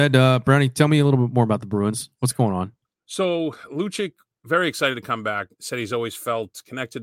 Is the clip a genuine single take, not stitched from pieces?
no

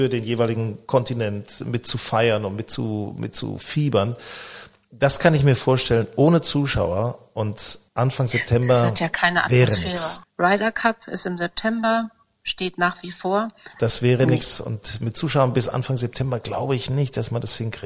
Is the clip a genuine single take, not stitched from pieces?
no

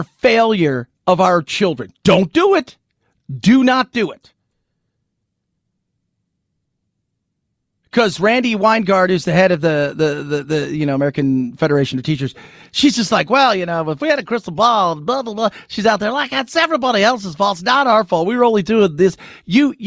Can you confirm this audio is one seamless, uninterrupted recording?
yes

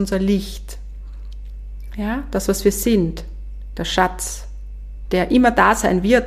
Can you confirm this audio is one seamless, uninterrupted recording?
yes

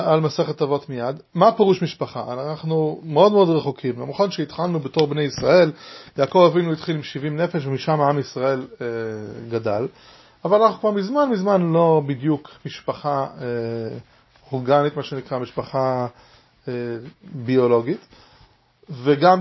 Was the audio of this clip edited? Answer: no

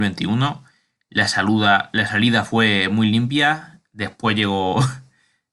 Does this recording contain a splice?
no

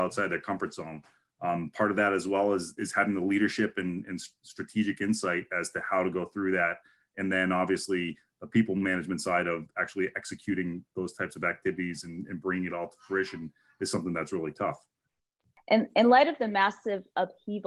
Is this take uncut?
yes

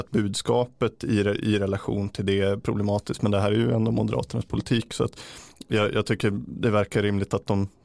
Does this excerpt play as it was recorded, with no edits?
yes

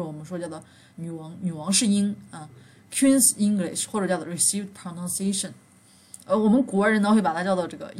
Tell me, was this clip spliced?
no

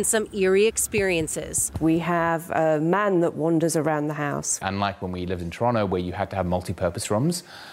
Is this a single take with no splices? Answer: no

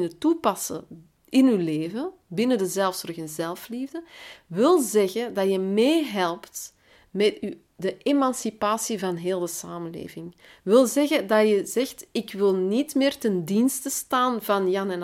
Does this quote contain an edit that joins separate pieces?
no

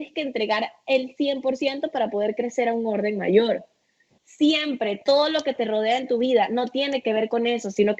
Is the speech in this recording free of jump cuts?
no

